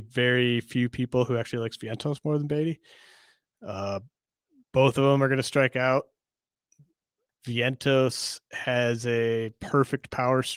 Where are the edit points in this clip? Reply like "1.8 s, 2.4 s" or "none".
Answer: 7.3 s